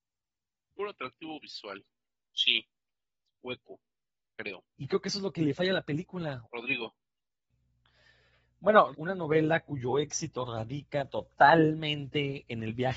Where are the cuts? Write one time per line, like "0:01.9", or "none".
0:04.7
0:06.4
0:08.9